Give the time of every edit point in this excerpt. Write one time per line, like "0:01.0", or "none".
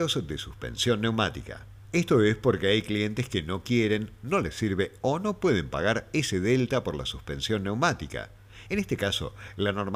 0:08.7